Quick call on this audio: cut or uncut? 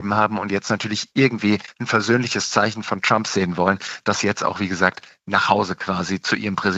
uncut